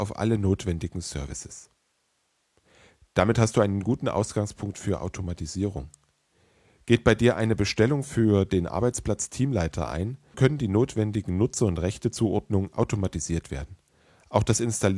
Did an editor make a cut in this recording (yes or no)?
yes